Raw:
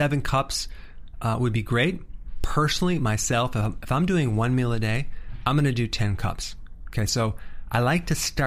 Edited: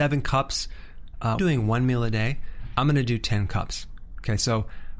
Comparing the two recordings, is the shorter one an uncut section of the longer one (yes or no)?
no